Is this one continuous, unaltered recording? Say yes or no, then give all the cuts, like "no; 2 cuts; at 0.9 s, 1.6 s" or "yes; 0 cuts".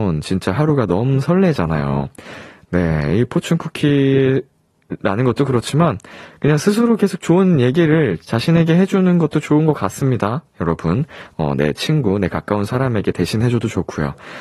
yes; 0 cuts